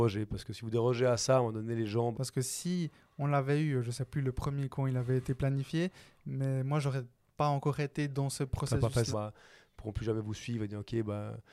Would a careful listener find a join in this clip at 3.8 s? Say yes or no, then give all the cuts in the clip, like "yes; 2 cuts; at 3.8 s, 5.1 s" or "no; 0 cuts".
no; 2 cuts; at 2.1 s, 9.1 s